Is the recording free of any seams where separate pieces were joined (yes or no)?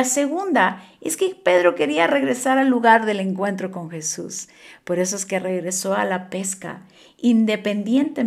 yes